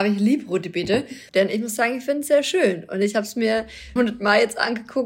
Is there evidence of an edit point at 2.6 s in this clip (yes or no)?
no